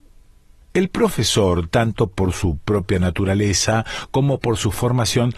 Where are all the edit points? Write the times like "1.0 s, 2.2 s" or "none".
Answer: none